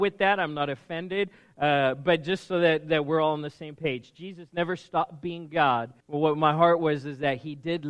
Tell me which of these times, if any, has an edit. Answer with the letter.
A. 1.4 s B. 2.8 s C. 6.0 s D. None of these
C